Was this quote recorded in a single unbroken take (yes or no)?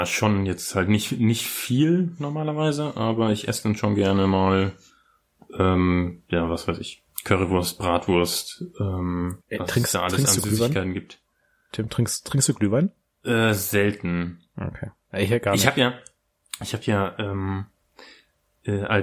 no